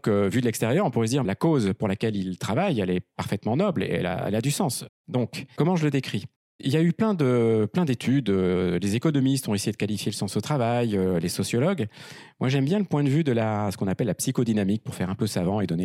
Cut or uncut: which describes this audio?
cut